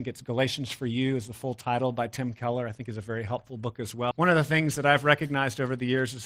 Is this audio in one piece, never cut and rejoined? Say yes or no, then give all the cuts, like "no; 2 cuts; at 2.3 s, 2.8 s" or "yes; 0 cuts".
no; 1 cut; at 4.1 s